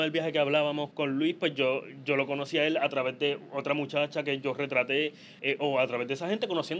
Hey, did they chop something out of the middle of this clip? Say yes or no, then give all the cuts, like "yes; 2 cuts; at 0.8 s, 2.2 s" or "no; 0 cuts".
yes; 2 cuts; at 0.9 s, 5.4 s